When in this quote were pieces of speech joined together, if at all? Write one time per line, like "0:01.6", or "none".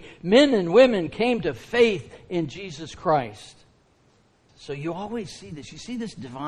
0:04.5